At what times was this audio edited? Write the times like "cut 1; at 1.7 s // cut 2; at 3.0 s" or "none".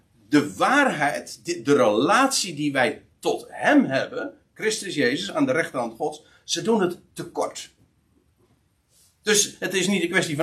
none